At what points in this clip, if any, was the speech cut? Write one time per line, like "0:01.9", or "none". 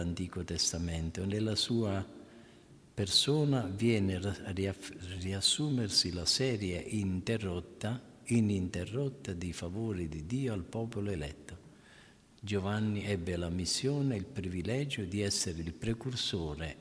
none